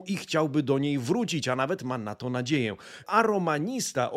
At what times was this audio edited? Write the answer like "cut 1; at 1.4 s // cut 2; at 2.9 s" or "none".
cut 1; at 3.0 s

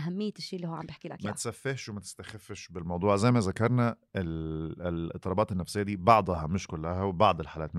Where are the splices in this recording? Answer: none

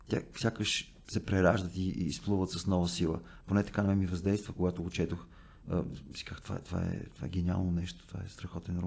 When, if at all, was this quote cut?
cut 1; at 3.4 s

